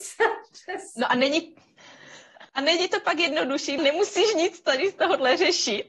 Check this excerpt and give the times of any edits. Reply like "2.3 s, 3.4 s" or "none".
2.5 s, 3.8 s